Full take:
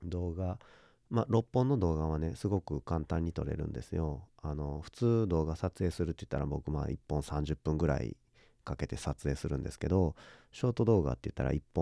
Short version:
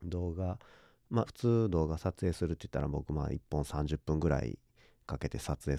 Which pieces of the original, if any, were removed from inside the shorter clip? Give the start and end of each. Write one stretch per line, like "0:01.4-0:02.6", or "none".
0:01.3-0:04.8